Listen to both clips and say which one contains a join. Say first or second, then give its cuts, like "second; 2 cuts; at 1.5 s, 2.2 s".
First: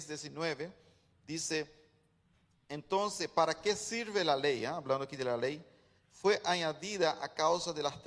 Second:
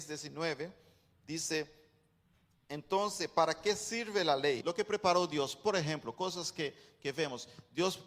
second; 1 cut; at 4.6 s